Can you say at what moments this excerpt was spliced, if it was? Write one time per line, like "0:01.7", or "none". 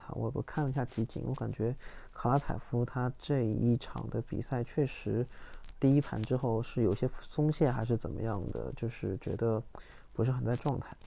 0:05.7